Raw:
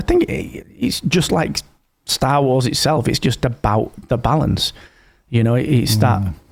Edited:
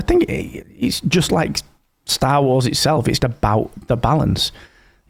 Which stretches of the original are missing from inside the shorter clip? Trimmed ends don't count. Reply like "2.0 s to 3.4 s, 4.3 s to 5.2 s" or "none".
3.2 s to 3.4 s

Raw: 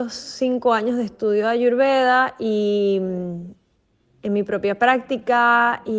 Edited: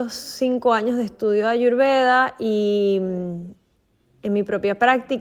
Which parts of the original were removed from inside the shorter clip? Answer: none

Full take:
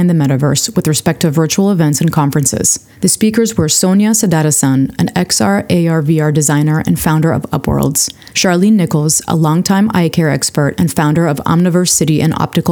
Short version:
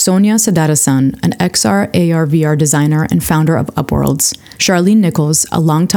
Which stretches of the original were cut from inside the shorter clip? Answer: none

